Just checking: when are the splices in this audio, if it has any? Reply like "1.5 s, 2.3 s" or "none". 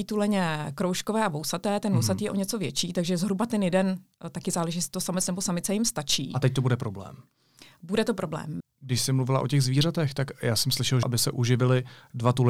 8.6 s, 11.0 s